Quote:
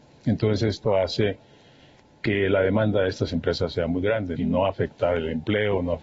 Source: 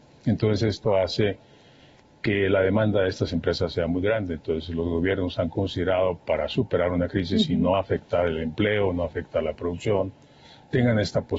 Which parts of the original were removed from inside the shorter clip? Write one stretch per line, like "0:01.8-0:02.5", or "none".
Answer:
0:04.4-0:07.5

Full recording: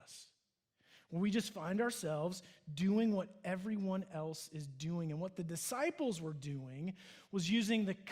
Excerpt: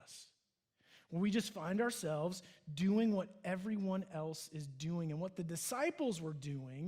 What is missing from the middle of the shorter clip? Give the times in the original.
none

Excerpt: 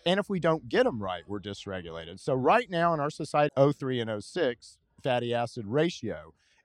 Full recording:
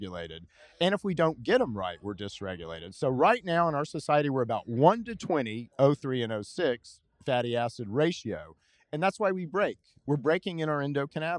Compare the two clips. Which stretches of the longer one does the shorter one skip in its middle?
0:04.2-0:05.7

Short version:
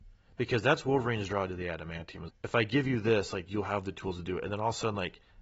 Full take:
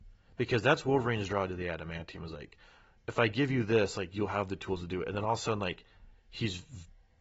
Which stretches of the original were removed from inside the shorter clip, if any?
0:02.3-0:02.9

